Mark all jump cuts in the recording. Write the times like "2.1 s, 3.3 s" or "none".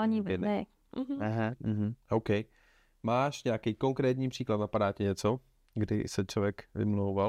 none